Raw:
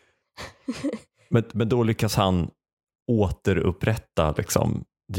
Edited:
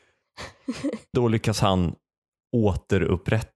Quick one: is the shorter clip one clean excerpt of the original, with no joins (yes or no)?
no